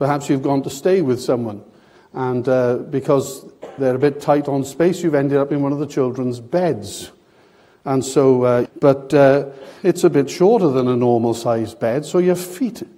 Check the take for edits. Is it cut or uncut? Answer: cut